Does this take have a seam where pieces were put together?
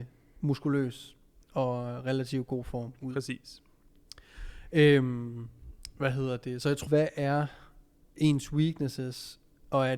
yes; 1 cut; at 6.9 s

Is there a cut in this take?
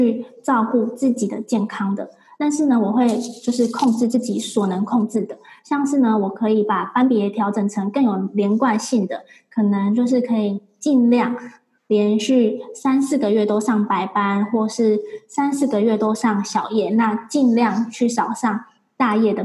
no; 0 cuts

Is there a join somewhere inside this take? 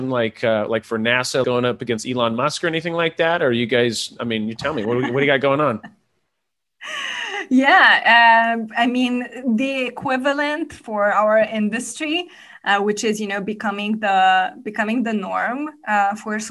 yes; 1 cut; at 1.4 s

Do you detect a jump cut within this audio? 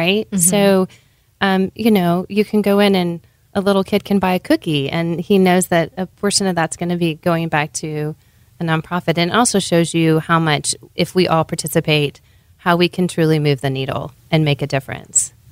no; 0 cuts

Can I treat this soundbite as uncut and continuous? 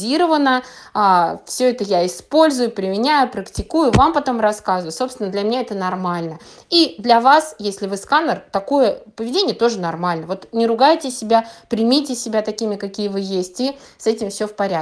yes; 0 cuts

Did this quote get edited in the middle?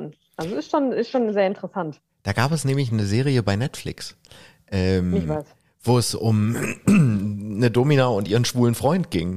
no; 0 cuts

